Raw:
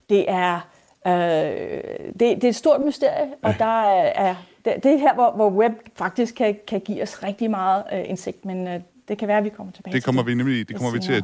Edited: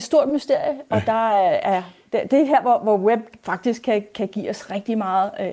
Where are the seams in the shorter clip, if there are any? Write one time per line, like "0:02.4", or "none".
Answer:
none